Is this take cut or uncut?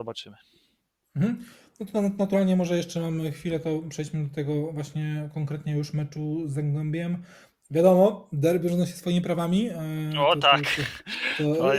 uncut